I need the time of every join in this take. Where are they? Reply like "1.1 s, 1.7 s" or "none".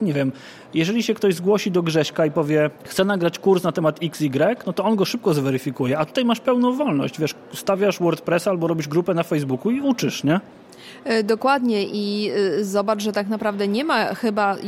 2.8 s

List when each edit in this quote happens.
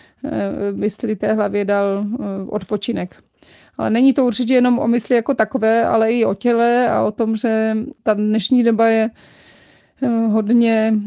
none

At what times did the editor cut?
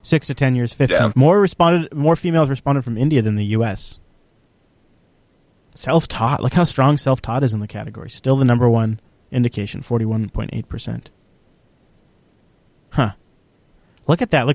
1.1 s

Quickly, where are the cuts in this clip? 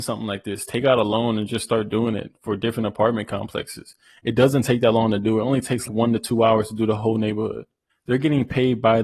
5.9 s, 7.9 s

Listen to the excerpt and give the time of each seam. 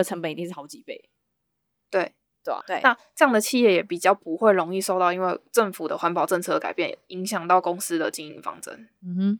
2.6 s

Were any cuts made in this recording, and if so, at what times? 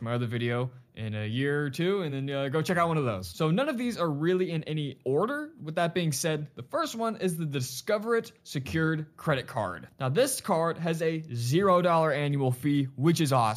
none

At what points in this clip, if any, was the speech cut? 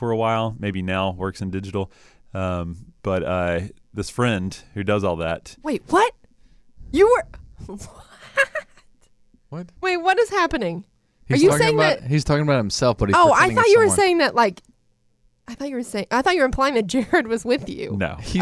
9.8 s

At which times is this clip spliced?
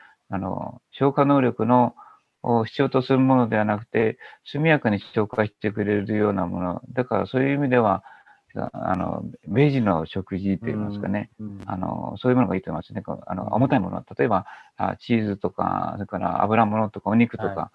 none

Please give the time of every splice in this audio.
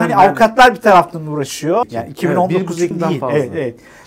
1.8 s, 2.9 s

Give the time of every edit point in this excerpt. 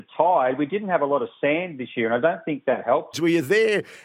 3.1 s

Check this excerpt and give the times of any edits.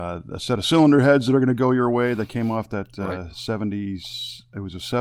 none

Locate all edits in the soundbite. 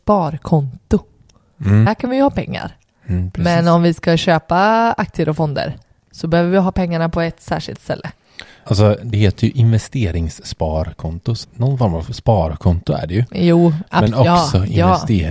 11.4 s

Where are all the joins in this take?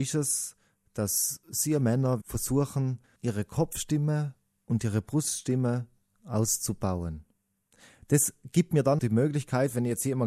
2.2 s, 9.0 s

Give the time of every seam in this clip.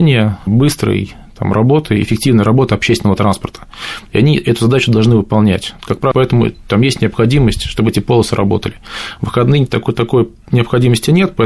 6.1 s

